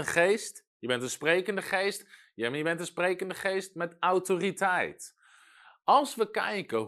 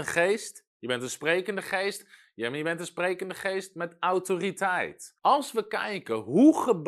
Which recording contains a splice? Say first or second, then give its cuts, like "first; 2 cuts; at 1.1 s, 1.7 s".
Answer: second; 1 cut; at 5.2 s